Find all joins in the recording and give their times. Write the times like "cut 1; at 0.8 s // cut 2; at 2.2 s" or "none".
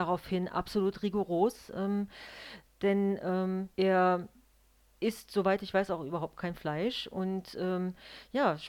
cut 1; at 3.7 s